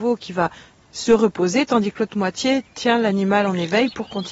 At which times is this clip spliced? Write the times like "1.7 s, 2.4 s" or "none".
none